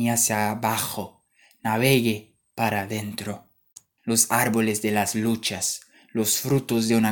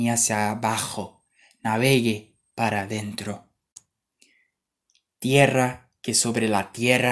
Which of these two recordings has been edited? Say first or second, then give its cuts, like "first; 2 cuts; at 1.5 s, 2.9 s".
first; 1 cut; at 4.0 s